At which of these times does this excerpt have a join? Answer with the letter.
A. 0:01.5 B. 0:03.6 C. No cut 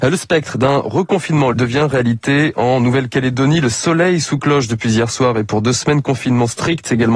A